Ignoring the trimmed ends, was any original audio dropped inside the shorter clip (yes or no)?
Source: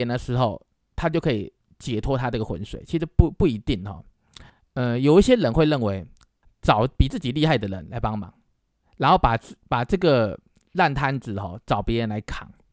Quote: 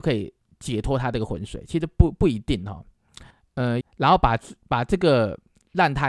yes